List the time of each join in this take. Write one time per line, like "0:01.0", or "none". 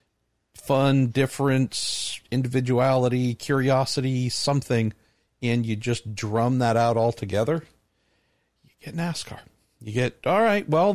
none